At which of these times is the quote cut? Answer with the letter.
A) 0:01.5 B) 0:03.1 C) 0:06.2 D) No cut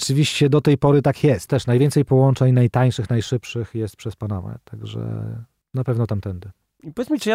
A